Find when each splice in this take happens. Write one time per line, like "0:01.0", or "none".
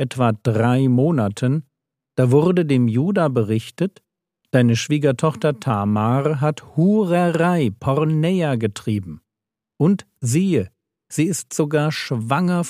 none